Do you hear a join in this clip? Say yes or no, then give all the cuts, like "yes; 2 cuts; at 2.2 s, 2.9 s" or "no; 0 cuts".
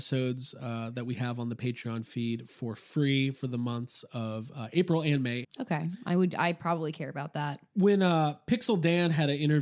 yes; 1 cut; at 5.4 s